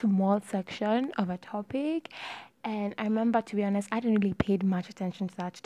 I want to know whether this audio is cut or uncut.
uncut